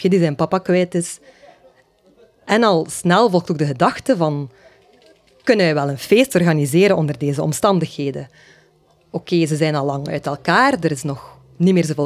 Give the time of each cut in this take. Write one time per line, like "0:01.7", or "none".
none